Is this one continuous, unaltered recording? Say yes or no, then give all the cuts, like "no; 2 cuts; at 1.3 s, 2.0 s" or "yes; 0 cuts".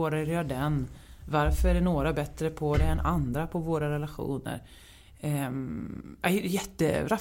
yes; 0 cuts